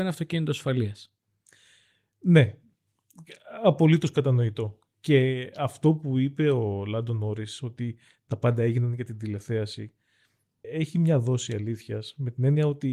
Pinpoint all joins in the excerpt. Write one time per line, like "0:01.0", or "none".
0:10.6